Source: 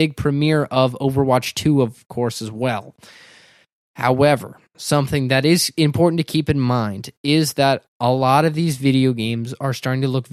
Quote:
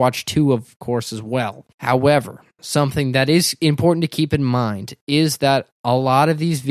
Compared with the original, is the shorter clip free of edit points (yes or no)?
no